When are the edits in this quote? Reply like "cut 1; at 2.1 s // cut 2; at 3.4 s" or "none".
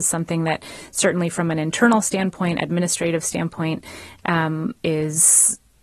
none